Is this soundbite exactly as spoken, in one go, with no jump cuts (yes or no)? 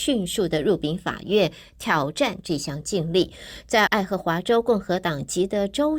no